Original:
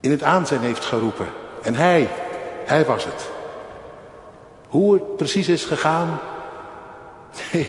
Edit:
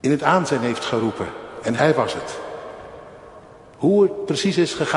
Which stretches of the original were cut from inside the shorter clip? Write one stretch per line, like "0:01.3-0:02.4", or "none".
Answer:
0:01.7-0:02.7